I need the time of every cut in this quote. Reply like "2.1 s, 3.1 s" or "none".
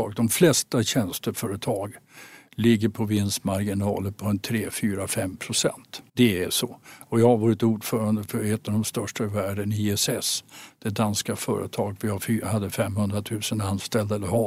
6.1 s

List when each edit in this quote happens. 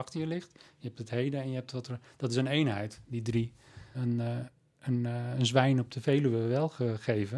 3.9 s

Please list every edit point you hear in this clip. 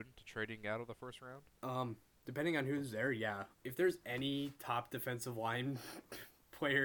1.6 s, 3.5 s

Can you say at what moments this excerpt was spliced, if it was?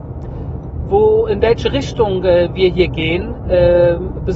none

